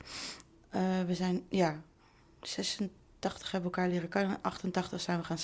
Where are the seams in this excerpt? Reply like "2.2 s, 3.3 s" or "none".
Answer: none